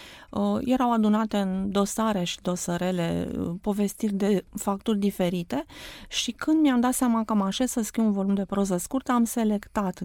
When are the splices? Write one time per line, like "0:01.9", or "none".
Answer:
none